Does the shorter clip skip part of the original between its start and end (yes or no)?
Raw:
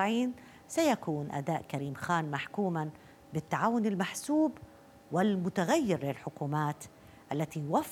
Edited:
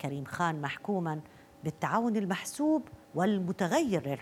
yes